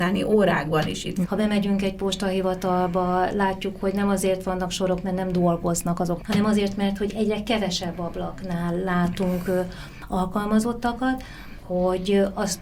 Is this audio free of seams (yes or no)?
no